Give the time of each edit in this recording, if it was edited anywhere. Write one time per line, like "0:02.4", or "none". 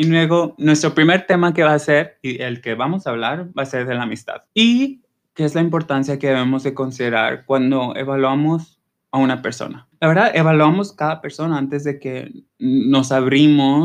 0:04.5
0:09.9
0:12.5